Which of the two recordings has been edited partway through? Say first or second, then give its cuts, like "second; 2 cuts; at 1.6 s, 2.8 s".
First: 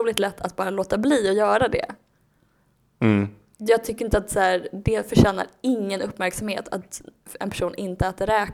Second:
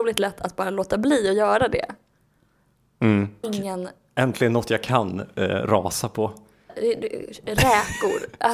second; 2 cuts; at 3.4 s, 6.7 s